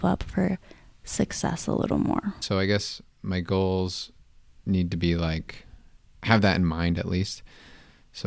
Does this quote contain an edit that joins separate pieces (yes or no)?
yes